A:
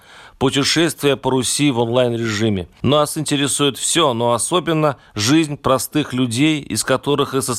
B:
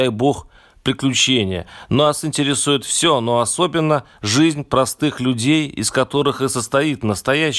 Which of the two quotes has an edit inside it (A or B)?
A